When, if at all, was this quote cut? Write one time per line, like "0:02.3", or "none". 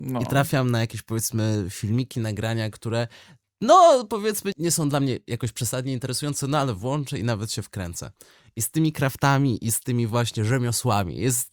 0:04.5